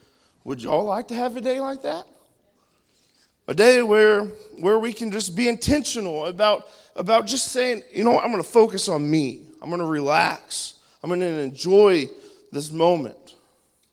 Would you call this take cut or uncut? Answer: uncut